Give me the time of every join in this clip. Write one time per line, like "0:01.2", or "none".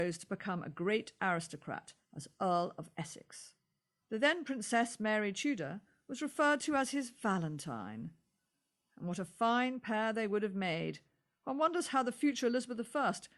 0:04.0